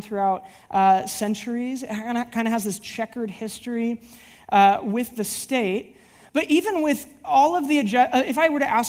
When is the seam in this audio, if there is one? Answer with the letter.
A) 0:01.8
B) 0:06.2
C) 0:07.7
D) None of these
D